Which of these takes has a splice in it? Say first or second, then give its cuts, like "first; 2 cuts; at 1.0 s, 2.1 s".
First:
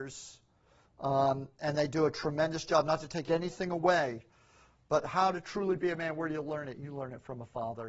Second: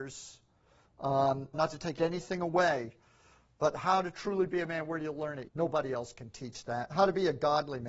second; 2 cuts; at 1.5 s, 5.5 s